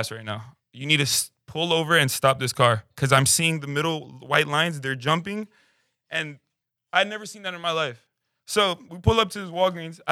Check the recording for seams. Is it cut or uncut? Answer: uncut